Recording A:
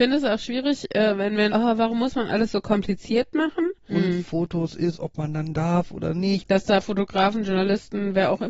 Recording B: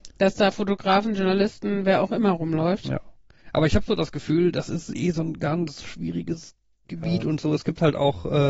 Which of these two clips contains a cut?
A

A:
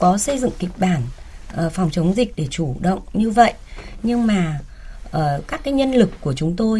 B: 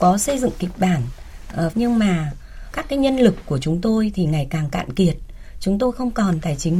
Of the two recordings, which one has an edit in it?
B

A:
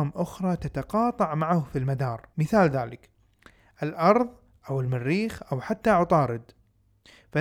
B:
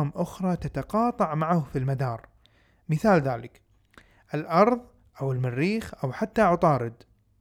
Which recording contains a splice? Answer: A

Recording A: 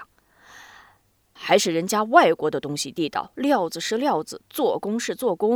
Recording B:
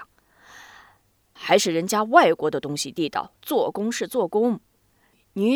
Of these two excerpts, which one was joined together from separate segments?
B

